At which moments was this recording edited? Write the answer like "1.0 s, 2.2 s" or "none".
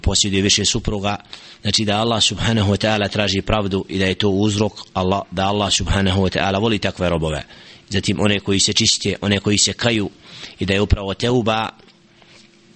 none